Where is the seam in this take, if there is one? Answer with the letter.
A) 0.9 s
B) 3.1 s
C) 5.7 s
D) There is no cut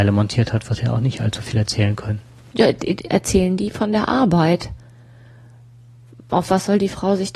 B